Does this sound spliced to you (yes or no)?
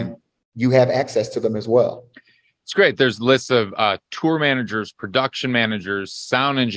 no